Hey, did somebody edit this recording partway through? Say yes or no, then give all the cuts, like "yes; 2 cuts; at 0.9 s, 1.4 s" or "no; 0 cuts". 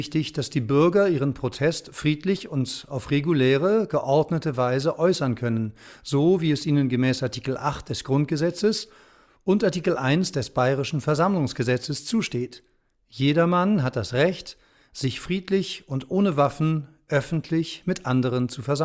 no; 0 cuts